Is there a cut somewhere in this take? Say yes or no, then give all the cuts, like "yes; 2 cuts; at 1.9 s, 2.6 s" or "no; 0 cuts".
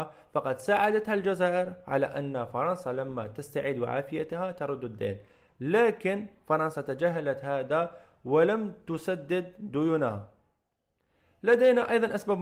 no; 0 cuts